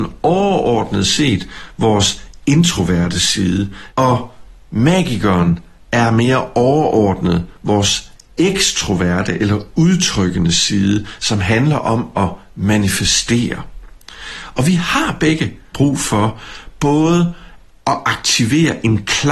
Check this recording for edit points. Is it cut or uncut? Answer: cut